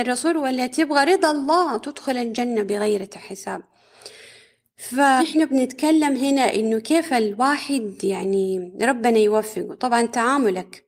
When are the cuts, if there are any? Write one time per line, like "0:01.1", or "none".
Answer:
none